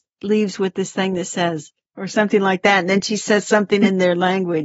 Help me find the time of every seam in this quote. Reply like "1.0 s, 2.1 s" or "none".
1.8 s